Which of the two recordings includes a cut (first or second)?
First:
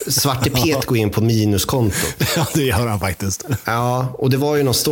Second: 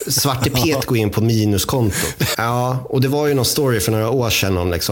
second